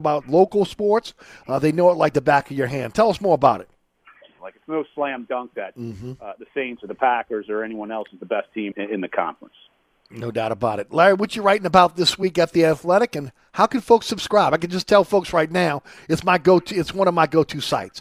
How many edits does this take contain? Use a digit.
2